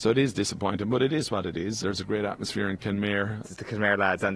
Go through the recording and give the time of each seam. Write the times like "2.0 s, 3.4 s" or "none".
1.8 s, 3.4 s